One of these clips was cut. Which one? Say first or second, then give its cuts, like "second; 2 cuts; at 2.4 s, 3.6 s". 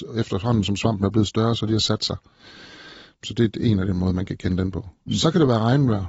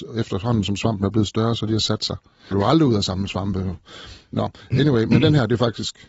second; 1 cut; at 2.5 s